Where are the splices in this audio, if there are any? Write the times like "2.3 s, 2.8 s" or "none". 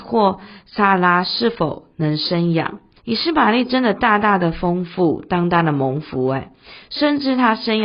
3.0 s, 6.8 s